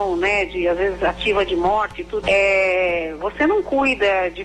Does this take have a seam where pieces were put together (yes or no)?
yes